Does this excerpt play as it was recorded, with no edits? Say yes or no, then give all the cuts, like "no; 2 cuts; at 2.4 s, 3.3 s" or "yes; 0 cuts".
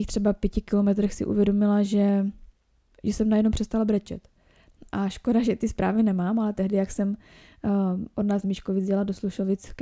yes; 0 cuts